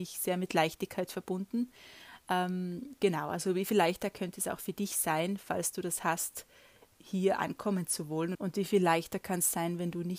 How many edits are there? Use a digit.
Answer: 1